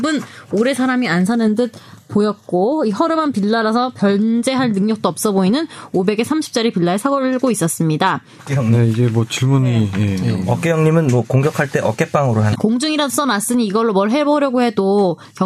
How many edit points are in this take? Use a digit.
3